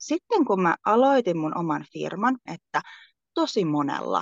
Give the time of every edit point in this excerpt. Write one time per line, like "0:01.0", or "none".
0:02.5